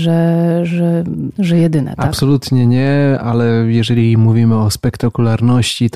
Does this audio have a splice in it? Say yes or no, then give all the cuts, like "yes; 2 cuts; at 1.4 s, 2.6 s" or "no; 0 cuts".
yes; 1 cut; at 1.3 s